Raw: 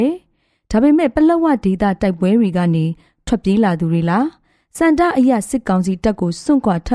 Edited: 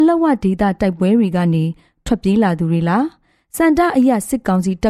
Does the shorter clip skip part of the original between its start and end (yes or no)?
no